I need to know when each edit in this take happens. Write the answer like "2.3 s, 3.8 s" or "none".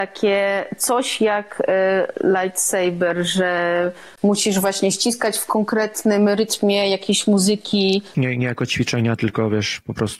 8.1 s